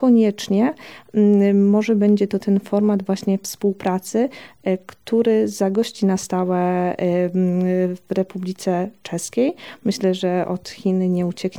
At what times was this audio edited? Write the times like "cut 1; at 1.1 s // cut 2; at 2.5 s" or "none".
cut 1; at 9.8 s

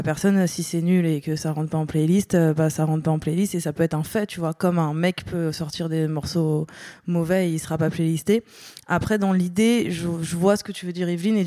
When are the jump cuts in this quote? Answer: none

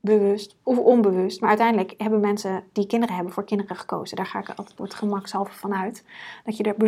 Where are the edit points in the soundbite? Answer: cut 1; at 4.8 s

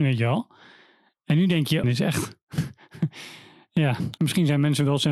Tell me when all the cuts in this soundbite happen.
cut 1; at 1.8 s // cut 2; at 4.2 s

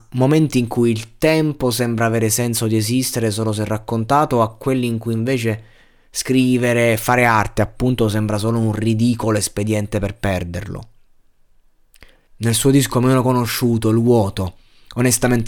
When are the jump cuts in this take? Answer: cut 1; at 12.3 s

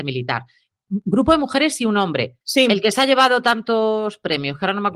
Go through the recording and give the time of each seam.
cut 1; at 2.4 s

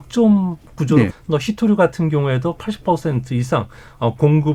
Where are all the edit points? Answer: cut 1; at 1.1 s

